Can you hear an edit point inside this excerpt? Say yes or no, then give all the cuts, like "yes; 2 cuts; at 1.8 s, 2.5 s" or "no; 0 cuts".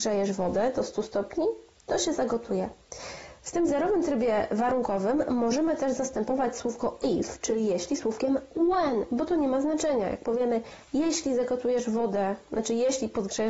no; 0 cuts